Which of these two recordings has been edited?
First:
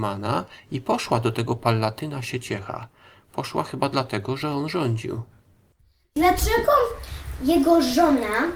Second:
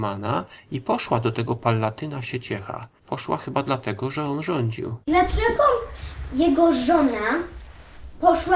second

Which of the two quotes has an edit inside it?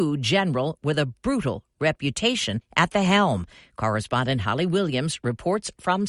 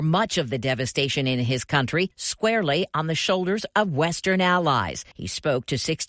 second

